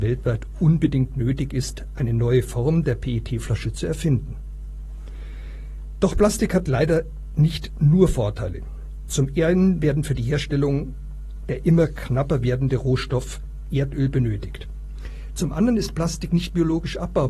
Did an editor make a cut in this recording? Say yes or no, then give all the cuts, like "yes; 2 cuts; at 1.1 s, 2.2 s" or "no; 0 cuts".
no; 0 cuts